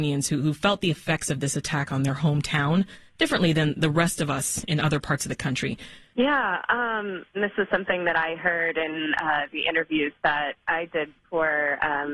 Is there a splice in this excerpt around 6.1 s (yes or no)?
yes